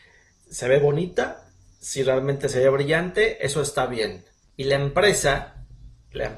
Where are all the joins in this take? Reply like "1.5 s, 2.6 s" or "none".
4.4 s